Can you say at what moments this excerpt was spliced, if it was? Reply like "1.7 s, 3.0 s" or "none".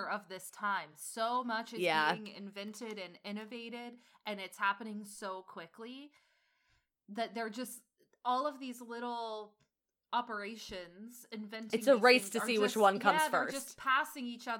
none